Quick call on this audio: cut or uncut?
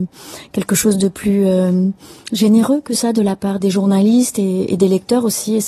cut